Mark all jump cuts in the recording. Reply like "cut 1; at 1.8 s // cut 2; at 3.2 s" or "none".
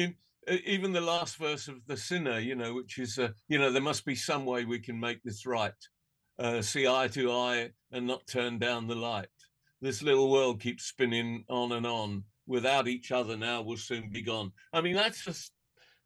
none